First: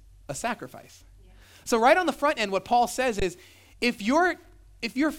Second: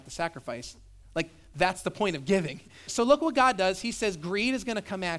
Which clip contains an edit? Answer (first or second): second